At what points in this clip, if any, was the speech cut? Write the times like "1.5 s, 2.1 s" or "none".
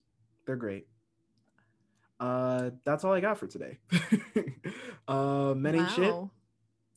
none